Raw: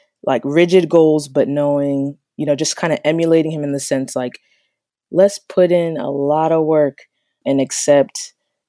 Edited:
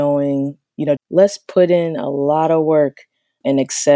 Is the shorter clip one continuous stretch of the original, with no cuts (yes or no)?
no